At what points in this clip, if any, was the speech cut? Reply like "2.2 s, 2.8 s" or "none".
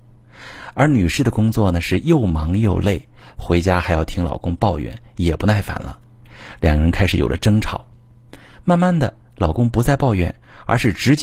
none